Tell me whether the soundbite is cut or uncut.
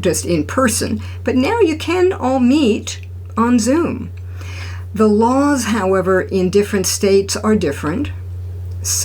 uncut